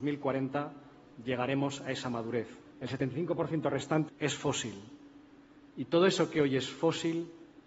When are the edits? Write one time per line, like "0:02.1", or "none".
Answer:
0:02.7
0:04.1